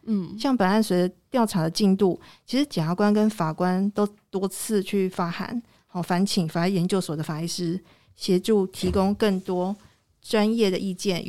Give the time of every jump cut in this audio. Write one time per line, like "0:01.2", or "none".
none